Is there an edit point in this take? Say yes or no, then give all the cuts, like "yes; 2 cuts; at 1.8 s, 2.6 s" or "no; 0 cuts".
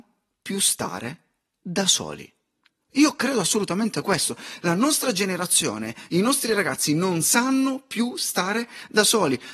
no; 0 cuts